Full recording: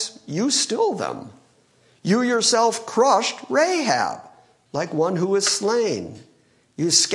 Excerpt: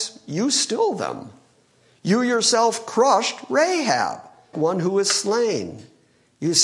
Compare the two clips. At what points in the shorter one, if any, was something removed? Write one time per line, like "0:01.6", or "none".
0:04.5